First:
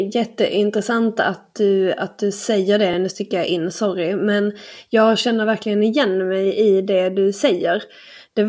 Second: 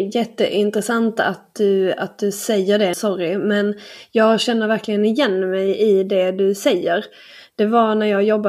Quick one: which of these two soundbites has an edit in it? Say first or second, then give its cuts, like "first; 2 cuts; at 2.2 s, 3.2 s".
second; 1 cut; at 2.9 s